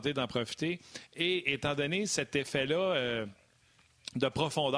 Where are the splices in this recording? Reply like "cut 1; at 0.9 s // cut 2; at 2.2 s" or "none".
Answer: none